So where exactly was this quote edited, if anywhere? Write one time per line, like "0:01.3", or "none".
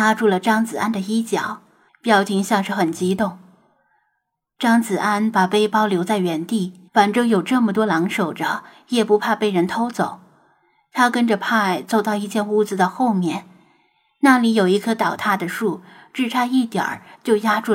0:01.9
0:06.9